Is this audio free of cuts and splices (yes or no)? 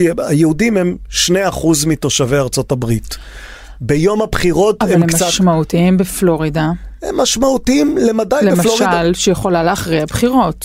yes